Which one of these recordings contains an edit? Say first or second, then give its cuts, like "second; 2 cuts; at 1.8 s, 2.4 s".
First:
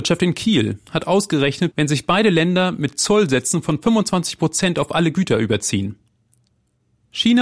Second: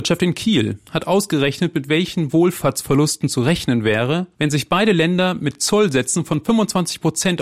first; 1 cut; at 1.7 s